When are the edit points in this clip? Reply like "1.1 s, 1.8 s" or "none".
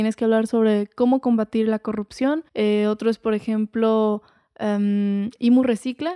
2.5 s